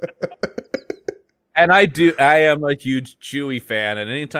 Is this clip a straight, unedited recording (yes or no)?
yes